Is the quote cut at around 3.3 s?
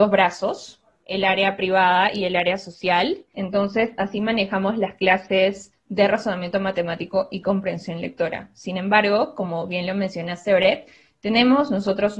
yes; 2 cuts; at 3.3 s, 5.7 s

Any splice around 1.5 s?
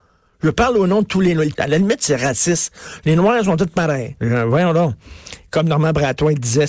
yes; 2 cuts; at 1.5 s, 4.2 s

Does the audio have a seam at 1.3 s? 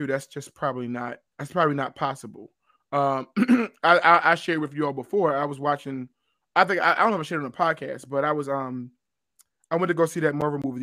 yes; 1 cut; at 1.3 s

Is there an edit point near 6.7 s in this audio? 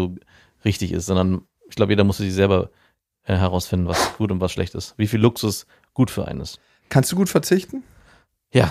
no; 0 cuts

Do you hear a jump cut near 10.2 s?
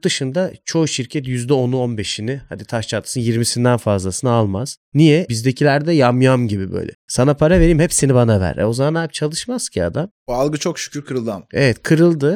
no; 1 cut; at 5.3 s

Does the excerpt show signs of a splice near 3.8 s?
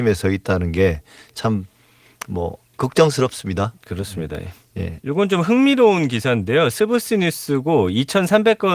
no; 1 cut; at 5.0 s

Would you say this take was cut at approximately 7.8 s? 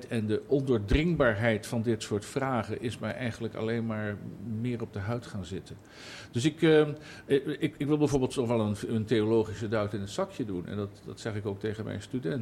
no; 0 cuts

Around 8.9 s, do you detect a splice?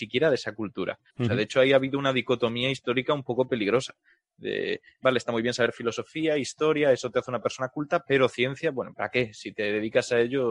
yes; 2 cuts; at 1.1 s, 8.9 s

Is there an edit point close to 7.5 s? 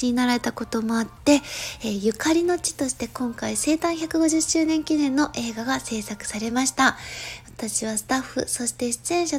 no; 0 cuts

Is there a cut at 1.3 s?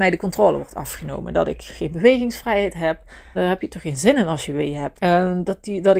no; 2 cuts; at 3.3 s, 4.9 s

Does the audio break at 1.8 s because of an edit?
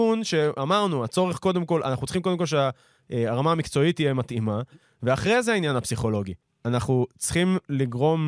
no; 1 cut; at 6.4 s

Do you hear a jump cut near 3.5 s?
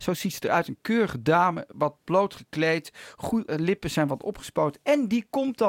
yes; 1 cut; at 3.5 s

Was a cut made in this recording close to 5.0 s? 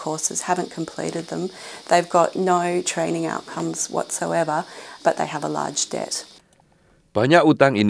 yes; 1 cut; at 5.0 s

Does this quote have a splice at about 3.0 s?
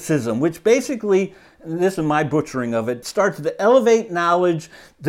yes; 1 cut; at 3.0 s

